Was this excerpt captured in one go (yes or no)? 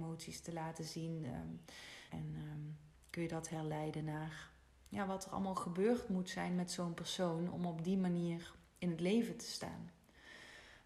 no